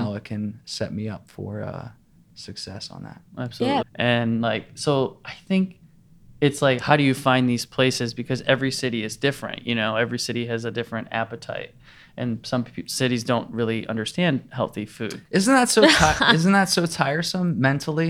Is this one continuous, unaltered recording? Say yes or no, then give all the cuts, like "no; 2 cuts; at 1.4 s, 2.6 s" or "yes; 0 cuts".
no; 1 cut; at 3.8 s